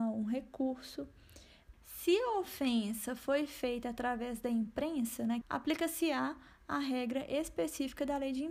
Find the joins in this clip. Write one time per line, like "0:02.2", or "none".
0:01.7
0:05.4